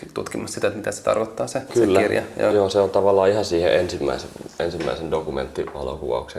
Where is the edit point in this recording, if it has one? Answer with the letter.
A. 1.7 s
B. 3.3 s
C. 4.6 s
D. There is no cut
A